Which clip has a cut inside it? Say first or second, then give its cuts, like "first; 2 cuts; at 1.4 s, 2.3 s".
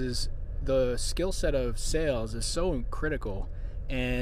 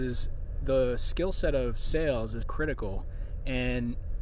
second; 1 cut; at 2.4 s